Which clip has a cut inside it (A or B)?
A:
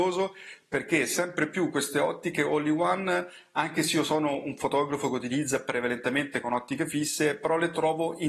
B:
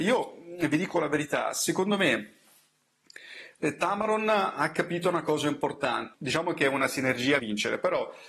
B